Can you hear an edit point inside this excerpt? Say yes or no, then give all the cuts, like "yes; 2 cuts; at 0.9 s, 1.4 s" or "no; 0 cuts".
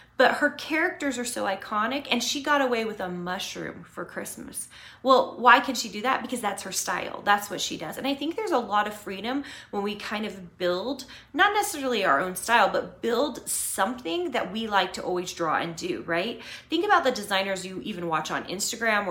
no; 0 cuts